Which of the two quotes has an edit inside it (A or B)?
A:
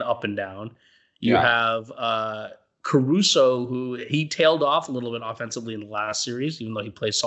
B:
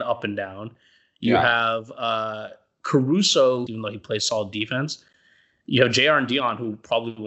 B